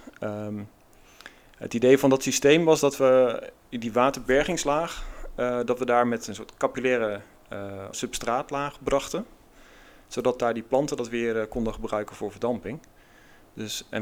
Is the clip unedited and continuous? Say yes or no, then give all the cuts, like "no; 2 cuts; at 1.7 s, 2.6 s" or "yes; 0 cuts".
no; 1 cut; at 7.9 s